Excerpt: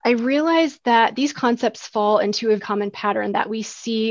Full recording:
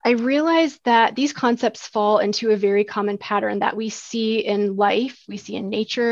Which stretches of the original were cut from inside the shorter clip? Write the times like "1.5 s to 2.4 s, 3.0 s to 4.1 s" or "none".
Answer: 2.6 s to 2.9 s